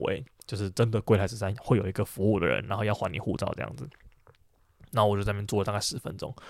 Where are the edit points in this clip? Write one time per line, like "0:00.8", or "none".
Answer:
none